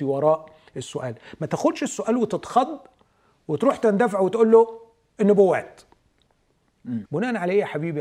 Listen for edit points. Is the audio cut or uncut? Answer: cut